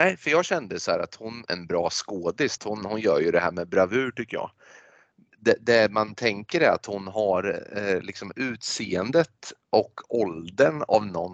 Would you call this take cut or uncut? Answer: cut